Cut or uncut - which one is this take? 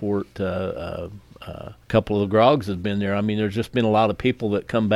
cut